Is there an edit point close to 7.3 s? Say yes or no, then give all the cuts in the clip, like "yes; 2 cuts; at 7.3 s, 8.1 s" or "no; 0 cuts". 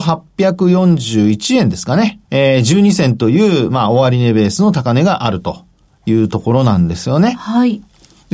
no; 1 cut; at 2.3 s